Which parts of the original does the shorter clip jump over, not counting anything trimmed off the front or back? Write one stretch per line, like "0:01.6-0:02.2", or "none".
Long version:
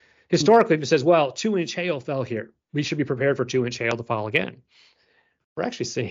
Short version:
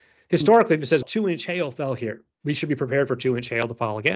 0:01.0-0:01.3

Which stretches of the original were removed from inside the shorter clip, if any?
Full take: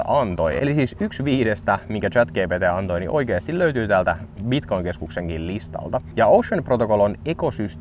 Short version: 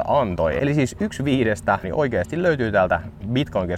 0:01.8-0:03.0

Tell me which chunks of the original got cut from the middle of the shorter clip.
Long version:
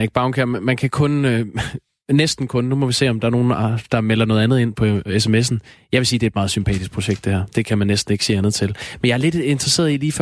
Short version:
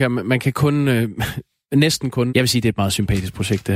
0:02.7-0:05.9

